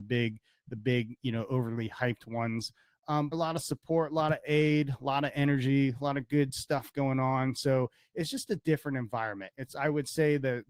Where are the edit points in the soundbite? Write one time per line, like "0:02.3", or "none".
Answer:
0:03.3
0:09.5